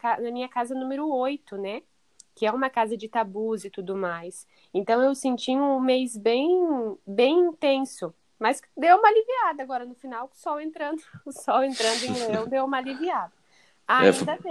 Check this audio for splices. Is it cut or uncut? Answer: uncut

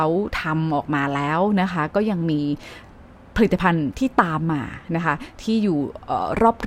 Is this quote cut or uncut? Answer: uncut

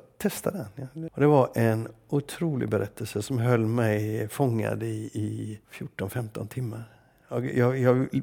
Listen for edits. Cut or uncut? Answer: cut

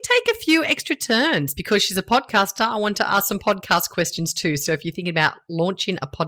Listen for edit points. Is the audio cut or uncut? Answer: uncut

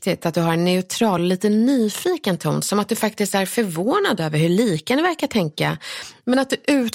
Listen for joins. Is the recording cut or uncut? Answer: uncut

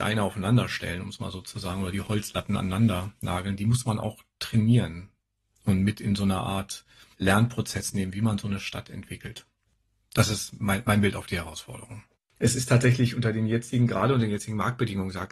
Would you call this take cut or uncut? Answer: uncut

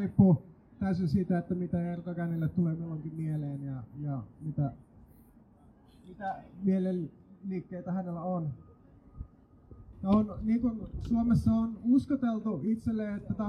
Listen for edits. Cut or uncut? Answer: cut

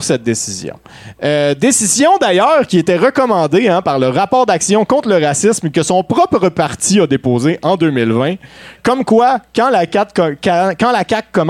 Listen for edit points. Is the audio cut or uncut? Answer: uncut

